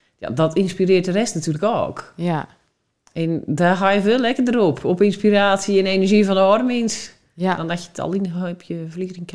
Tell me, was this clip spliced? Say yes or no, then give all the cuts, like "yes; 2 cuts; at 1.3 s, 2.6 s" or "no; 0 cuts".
no; 0 cuts